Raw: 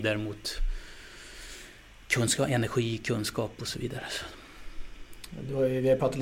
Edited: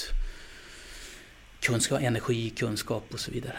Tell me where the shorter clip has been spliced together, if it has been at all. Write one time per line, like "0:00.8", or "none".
none